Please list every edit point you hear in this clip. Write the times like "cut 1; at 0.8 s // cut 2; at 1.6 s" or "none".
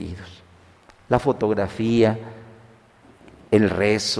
none